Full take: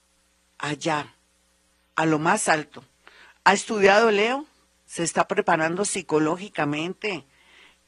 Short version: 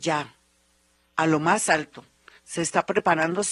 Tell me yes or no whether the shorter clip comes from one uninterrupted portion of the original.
no